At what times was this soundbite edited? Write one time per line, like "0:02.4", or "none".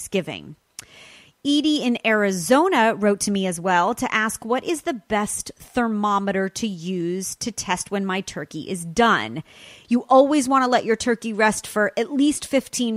0:09.8